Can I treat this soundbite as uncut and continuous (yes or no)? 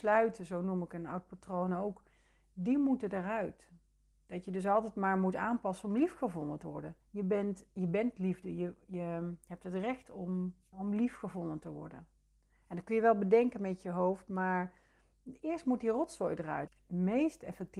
no